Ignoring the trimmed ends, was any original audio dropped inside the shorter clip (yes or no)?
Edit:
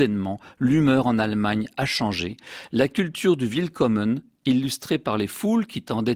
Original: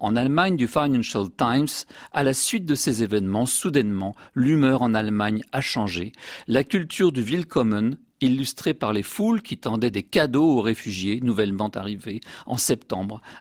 no